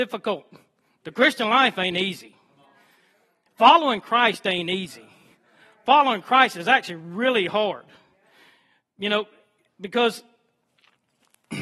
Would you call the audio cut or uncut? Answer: uncut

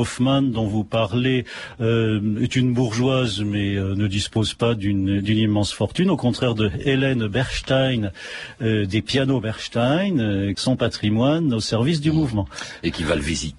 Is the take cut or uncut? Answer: cut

